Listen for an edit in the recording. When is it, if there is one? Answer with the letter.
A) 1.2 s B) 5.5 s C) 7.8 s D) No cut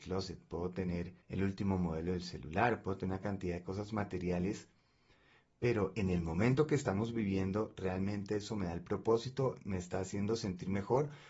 A